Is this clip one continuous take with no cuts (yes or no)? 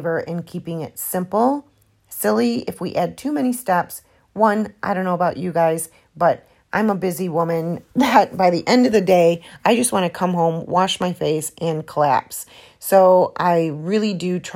yes